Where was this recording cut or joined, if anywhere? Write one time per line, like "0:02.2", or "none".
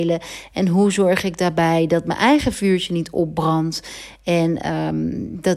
none